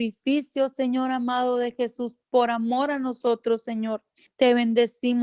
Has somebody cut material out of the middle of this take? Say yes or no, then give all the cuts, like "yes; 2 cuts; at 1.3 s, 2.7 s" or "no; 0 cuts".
yes; 1 cut; at 4.3 s